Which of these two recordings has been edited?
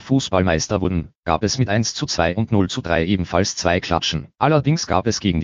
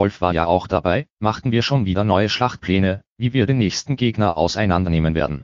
first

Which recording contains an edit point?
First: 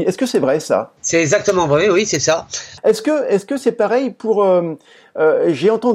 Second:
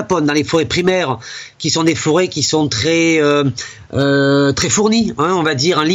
first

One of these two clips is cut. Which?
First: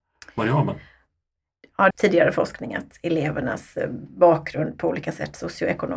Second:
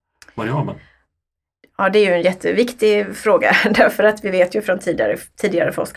first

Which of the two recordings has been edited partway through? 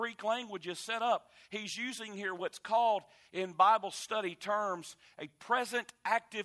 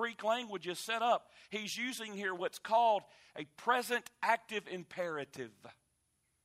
second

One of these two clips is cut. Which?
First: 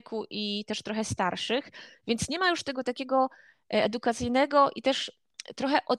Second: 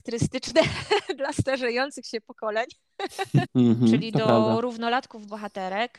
second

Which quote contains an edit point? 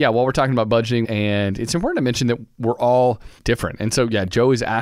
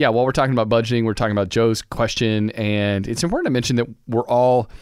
first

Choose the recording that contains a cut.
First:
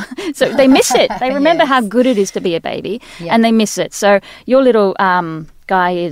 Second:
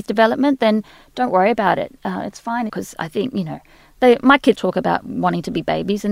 second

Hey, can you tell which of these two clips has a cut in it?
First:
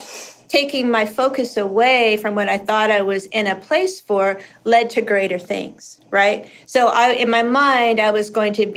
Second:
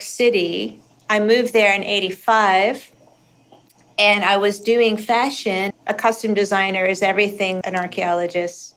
second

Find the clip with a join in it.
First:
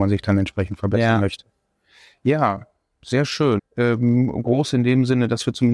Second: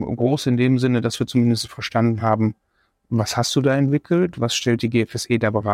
first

